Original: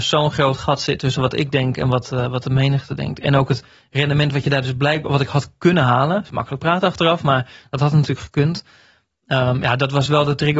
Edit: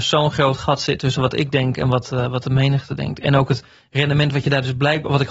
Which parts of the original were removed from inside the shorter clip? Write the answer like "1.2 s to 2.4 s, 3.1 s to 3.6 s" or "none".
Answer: none